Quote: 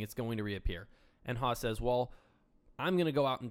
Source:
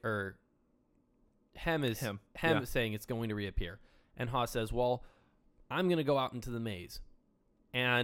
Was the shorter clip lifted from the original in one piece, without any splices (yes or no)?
yes